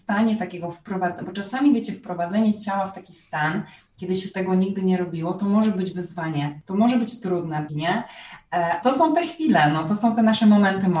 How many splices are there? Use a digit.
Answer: 2